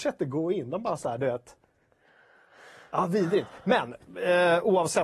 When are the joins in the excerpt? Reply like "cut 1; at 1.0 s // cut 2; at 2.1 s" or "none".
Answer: none